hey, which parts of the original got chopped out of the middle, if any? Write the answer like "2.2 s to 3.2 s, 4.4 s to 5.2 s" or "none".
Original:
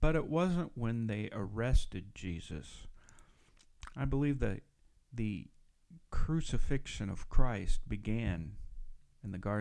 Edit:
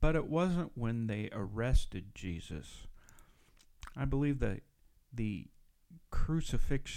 none